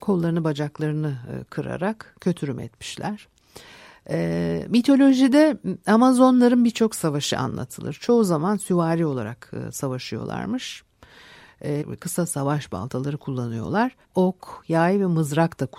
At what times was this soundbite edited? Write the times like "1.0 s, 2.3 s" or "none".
11.8 s, 14.0 s